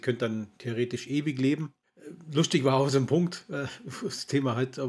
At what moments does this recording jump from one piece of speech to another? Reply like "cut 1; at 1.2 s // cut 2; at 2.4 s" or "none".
none